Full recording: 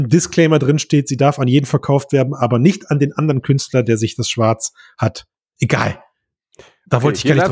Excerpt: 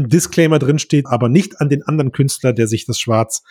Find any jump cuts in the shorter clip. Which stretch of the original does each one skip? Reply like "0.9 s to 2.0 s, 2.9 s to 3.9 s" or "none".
1.0 s to 2.3 s

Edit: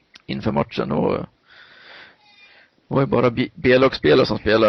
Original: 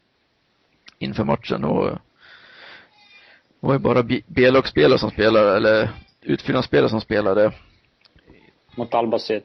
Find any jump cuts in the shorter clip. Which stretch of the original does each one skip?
none

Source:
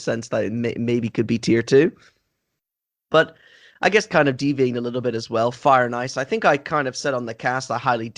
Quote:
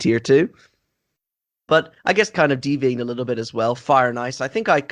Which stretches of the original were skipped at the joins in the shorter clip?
3.4 s to 3.7 s

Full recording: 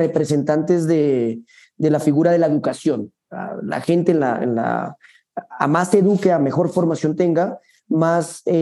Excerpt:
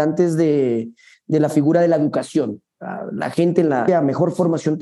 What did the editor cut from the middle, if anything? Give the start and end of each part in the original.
4.4 s to 6.3 s

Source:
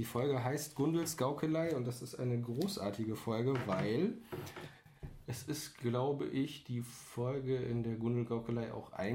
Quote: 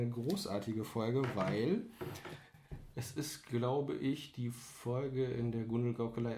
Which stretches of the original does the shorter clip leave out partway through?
none

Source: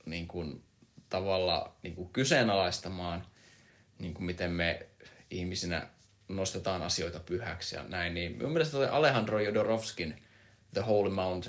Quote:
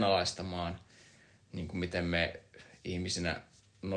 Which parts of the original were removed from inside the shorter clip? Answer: none

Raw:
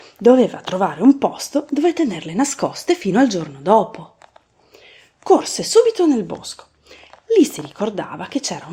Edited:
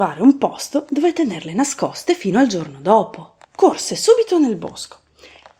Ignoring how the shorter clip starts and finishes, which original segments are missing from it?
4.3 s to 5.1 s

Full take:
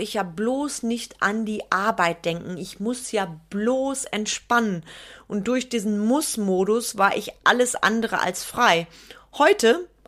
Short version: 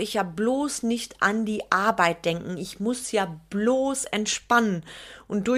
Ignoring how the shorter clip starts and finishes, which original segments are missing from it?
none

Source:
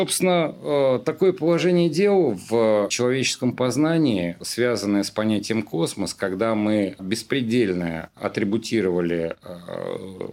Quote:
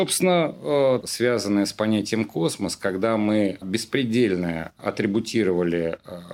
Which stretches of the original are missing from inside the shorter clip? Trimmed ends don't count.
1.0 s to 4.4 s

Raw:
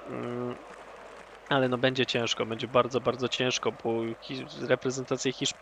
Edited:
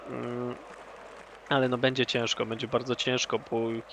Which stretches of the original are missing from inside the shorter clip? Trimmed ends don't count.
2.7 s to 3.0 s

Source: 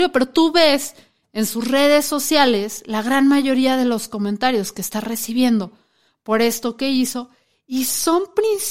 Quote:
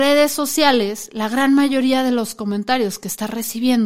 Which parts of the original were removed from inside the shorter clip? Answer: none

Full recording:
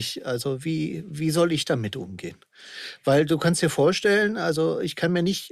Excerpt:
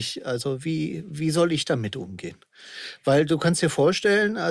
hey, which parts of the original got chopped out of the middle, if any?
none

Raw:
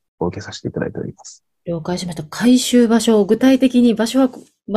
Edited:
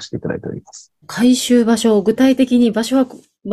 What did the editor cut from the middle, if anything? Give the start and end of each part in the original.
1.5 s to 2.3 s

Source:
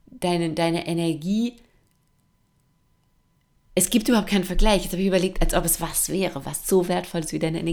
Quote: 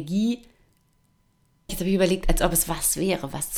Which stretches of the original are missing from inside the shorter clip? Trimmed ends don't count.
2.8 s to 4.8 s

